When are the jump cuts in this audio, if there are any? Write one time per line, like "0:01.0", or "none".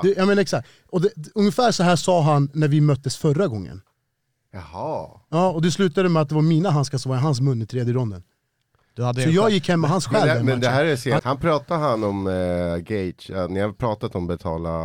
0:11.2